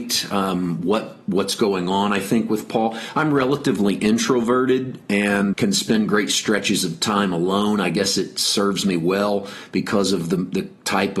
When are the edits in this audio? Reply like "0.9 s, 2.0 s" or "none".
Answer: 5.5 s